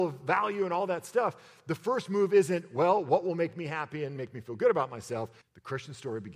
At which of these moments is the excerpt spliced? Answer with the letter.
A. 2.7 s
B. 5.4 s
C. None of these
B